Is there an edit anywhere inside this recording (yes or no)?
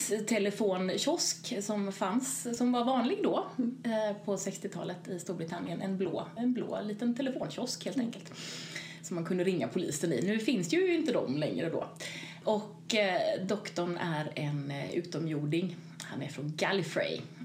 yes